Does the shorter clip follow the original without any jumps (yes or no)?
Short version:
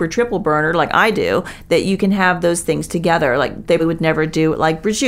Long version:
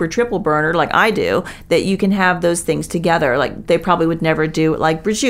no